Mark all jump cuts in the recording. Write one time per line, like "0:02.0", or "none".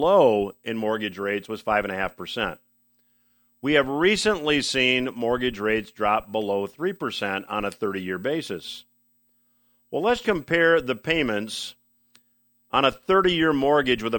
0:10.2